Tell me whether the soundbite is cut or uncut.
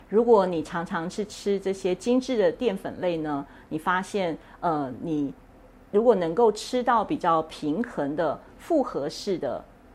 uncut